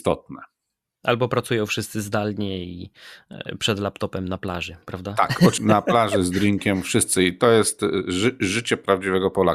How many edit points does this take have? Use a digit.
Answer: 1